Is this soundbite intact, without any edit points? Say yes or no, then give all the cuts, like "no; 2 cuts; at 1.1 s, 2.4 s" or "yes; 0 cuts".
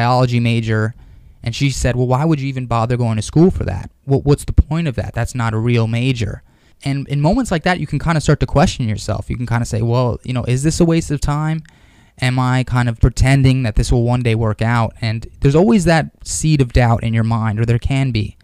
no; 1 cut; at 13.0 s